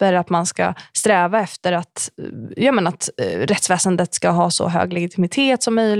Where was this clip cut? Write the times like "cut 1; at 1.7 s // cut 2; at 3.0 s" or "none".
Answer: none